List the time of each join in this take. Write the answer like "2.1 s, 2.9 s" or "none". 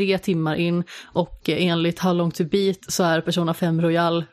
none